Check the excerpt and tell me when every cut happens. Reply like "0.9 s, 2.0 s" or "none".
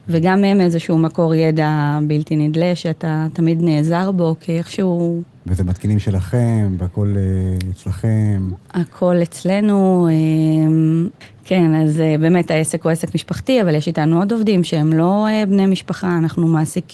none